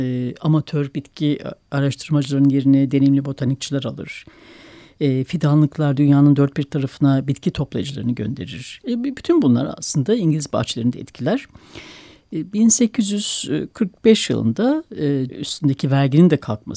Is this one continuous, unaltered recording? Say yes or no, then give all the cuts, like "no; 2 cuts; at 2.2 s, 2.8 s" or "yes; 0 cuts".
no; 2 cuts; at 8.8 s, 15.3 s